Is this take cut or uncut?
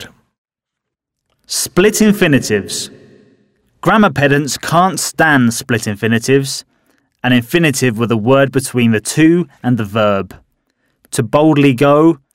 uncut